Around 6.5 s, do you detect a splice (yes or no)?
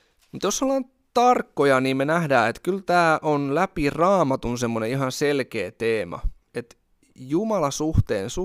yes